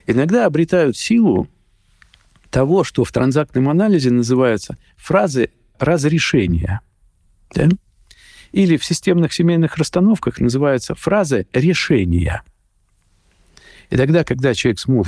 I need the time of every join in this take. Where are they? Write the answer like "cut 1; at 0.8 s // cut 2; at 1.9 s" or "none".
none